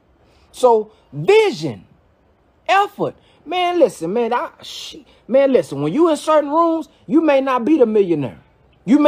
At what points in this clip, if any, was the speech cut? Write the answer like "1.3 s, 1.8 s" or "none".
none